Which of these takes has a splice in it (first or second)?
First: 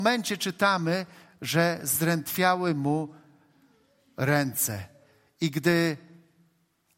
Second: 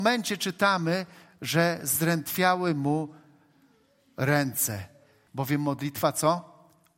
second